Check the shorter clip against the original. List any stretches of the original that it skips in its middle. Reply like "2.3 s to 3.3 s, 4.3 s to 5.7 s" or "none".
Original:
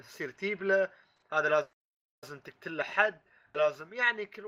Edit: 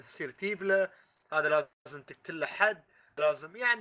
1.8 s to 2.1 s